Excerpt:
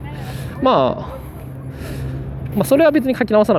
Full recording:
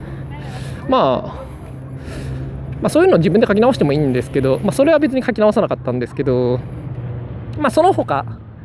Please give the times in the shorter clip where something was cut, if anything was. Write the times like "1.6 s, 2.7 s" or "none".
2.5 s